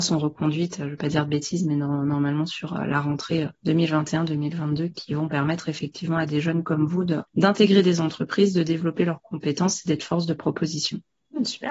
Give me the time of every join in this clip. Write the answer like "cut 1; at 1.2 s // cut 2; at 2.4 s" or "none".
none